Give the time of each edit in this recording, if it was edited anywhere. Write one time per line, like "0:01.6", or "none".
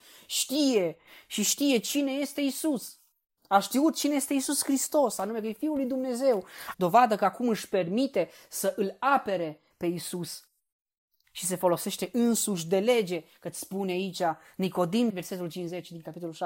0:06.7
0:15.1